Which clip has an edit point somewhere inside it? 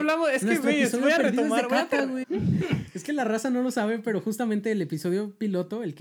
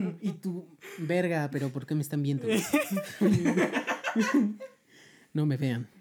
first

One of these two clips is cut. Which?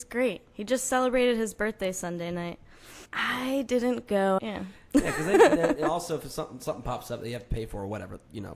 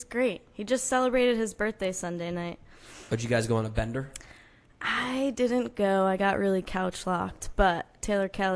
first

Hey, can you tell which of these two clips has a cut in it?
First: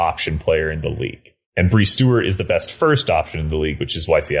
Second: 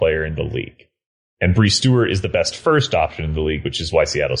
first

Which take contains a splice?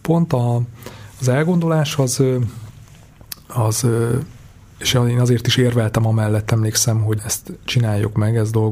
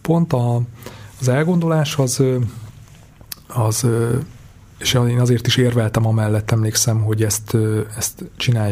first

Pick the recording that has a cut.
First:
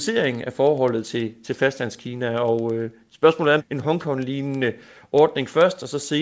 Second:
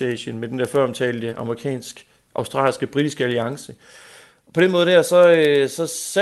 first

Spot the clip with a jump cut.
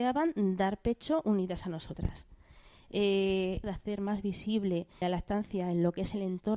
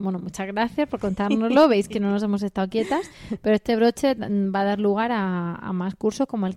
first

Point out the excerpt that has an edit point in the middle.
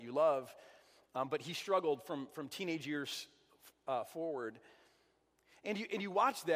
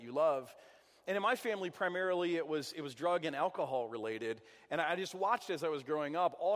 first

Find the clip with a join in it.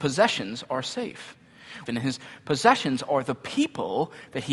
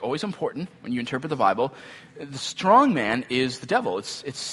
first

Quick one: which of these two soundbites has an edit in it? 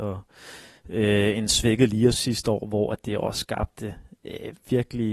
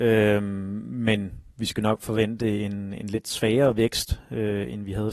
first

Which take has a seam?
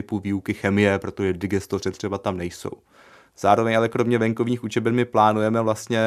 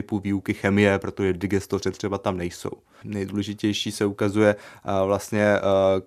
second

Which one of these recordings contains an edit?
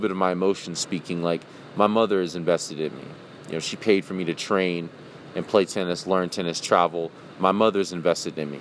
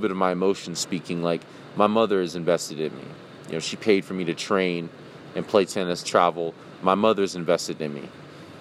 second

